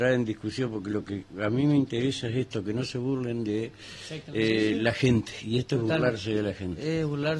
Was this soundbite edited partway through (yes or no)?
no